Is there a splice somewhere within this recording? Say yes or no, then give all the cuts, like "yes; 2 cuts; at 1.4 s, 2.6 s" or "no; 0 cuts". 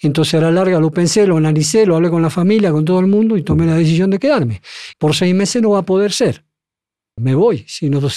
yes; 2 cuts; at 4.9 s, 7.2 s